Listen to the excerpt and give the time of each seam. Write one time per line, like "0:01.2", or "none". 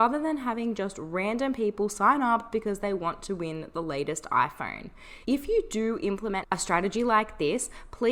0:05.2